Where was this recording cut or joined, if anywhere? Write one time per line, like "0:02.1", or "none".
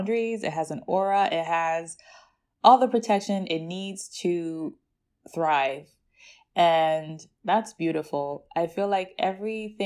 none